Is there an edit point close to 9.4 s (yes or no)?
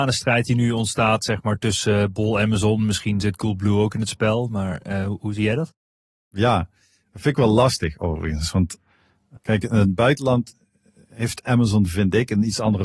yes